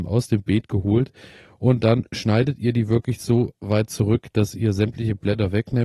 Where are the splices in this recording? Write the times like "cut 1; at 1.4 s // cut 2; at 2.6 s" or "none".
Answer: none